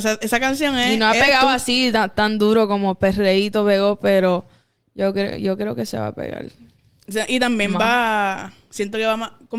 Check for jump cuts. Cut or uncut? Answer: uncut